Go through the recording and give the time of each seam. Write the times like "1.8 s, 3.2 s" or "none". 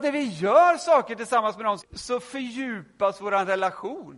1.8 s